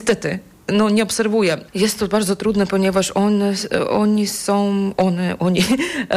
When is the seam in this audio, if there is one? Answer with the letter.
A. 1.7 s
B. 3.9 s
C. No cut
A